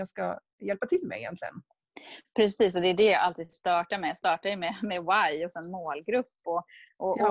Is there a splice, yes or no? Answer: no